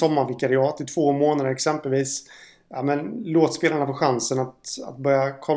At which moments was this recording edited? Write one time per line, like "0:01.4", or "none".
none

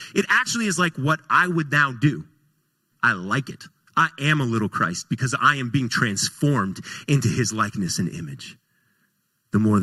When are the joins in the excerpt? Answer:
0:02.9

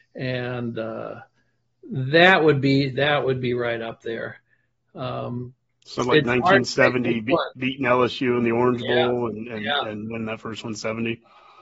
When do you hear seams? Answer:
none

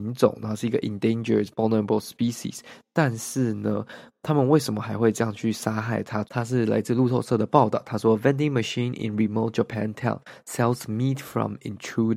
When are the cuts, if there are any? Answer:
0:06.2

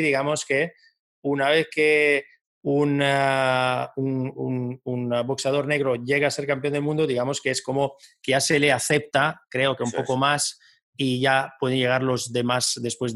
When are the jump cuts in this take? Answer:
none

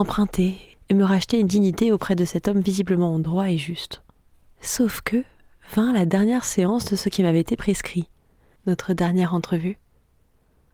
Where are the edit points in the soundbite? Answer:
none

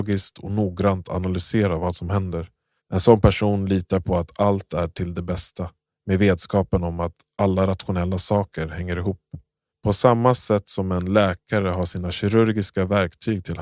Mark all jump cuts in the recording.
0:02.8
0:09.7

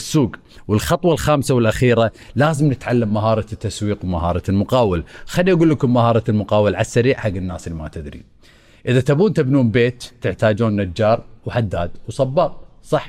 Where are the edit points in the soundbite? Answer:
none

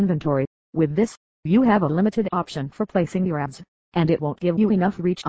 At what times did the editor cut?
none

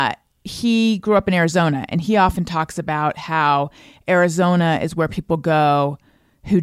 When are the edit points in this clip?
none

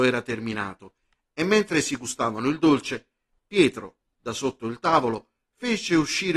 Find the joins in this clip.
none

